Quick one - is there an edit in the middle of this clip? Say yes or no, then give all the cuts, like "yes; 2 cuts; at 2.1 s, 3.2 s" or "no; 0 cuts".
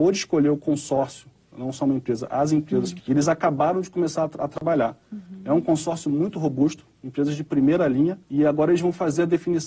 yes; 2 cuts; at 3.0 s, 8.2 s